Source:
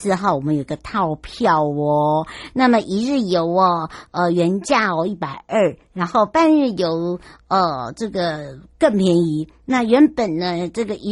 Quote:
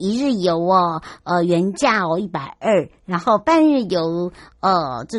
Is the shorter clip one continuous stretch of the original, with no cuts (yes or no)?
yes